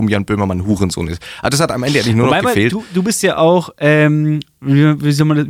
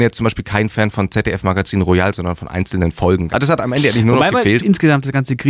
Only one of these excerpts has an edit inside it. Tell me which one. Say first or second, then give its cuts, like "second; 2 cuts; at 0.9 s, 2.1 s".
second; 2 cuts; at 3.3 s, 4.6 s